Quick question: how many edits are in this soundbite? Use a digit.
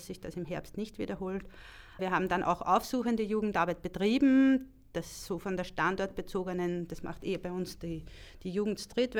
1